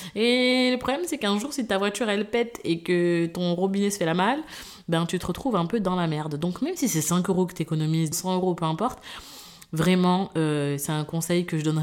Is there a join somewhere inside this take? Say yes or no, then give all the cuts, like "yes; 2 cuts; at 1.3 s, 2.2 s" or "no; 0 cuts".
yes; 1 cut; at 8.1 s